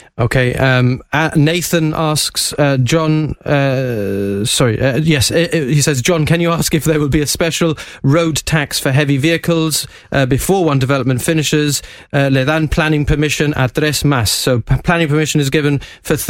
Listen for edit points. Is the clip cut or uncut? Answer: uncut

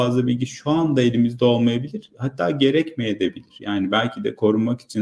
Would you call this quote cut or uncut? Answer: uncut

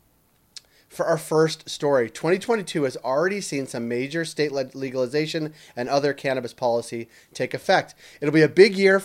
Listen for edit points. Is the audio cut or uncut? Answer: uncut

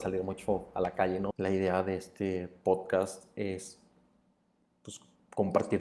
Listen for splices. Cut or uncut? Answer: cut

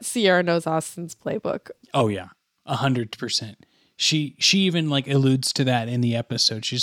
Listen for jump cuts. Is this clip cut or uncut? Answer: cut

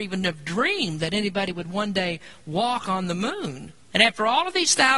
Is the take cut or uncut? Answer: cut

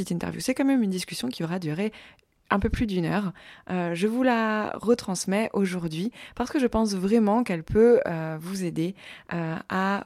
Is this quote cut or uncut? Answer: uncut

